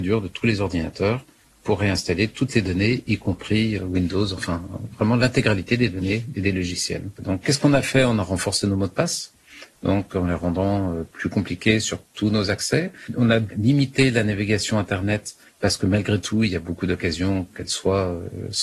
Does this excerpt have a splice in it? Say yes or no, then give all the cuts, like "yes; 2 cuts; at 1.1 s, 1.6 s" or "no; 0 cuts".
yes; 1 cut; at 7.2 s